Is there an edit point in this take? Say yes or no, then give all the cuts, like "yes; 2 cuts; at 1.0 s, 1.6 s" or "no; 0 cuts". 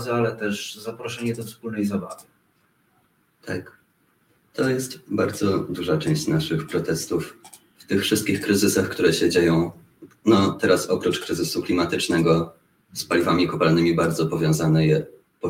no; 0 cuts